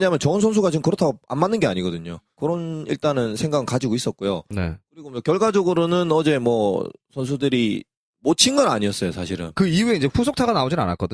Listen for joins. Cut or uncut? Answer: cut